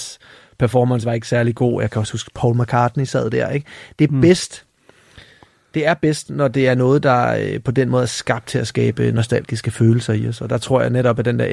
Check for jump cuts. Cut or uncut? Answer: uncut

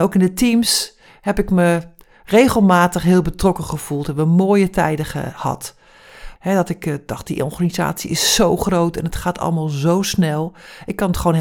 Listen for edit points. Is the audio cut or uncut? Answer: cut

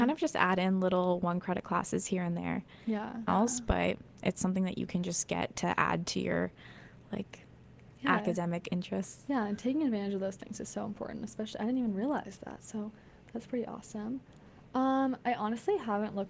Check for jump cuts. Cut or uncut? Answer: cut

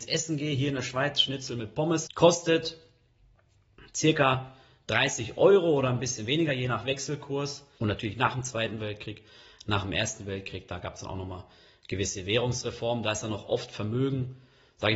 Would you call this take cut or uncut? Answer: cut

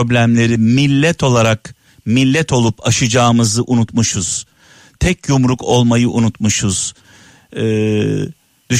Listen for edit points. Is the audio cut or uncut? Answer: uncut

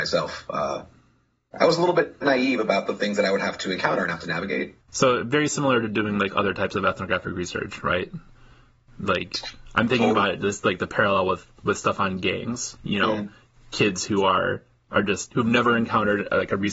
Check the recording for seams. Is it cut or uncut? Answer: cut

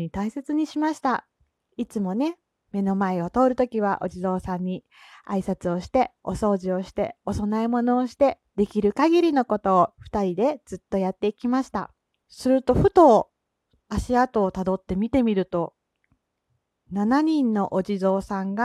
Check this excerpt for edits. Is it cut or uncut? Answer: cut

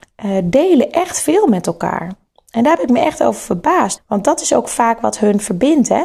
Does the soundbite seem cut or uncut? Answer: cut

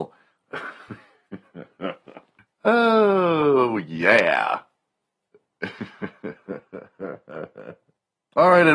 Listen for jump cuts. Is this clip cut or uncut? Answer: uncut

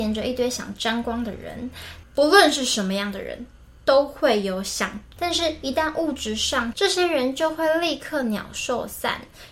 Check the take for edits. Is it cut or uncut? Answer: cut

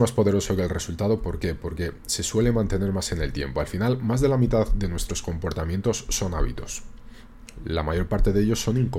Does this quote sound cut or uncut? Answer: uncut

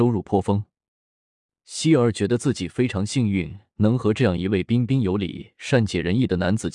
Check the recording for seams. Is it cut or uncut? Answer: uncut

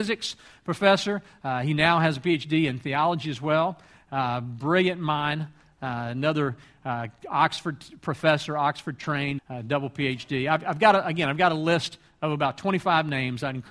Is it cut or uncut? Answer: cut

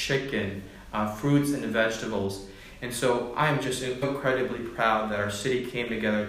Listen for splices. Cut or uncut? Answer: cut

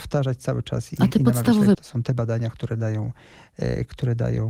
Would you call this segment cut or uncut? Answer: cut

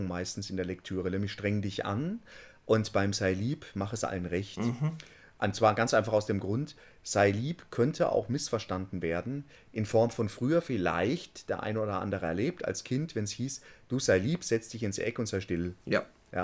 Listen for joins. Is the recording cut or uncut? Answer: uncut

